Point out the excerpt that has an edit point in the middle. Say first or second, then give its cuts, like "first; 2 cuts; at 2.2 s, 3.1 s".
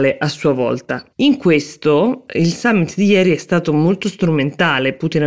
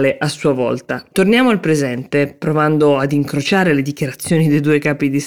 second; 1 cut; at 1.1 s